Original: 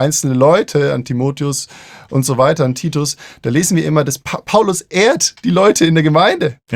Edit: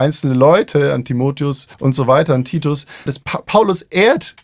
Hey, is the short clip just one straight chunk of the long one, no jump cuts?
no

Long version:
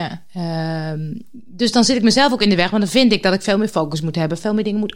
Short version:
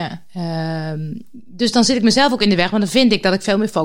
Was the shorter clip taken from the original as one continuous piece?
yes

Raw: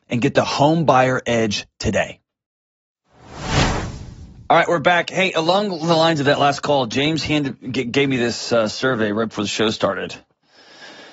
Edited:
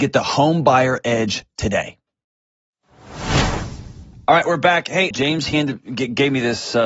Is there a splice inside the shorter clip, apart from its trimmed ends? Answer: yes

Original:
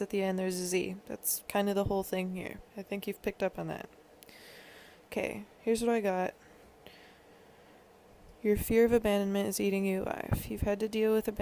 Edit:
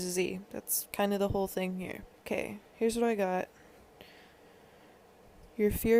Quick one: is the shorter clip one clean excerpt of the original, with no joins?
no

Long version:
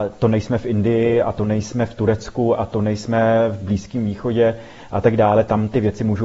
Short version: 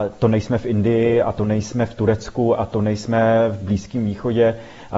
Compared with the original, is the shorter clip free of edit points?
yes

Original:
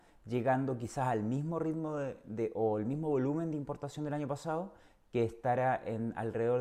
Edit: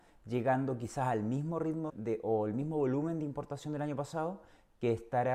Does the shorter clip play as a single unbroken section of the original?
no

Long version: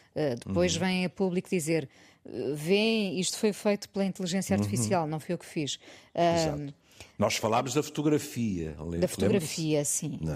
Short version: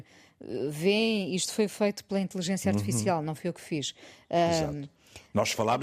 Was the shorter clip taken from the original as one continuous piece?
yes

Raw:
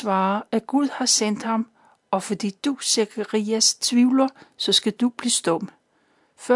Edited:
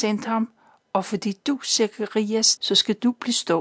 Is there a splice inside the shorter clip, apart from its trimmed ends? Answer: yes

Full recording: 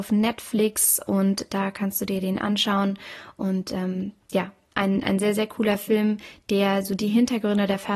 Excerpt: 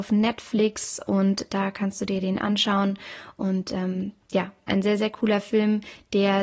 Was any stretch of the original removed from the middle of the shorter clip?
yes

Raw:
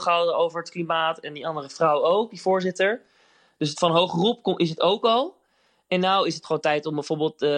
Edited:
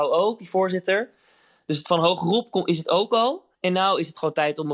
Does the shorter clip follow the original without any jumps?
no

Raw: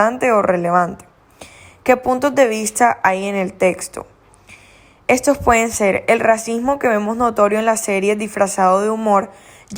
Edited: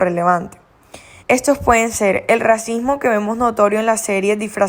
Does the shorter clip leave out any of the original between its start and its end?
yes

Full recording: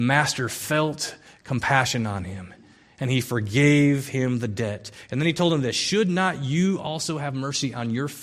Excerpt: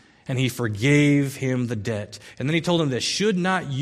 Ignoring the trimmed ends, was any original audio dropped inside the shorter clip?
no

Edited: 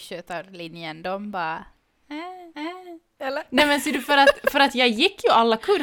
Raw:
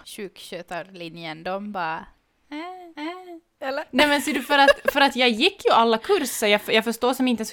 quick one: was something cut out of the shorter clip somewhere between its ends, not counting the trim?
no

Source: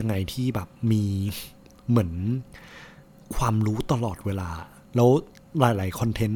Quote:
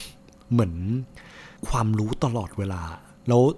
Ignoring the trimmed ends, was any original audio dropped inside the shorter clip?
yes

